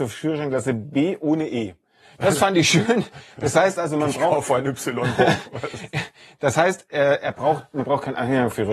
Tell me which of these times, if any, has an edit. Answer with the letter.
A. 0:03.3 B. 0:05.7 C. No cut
C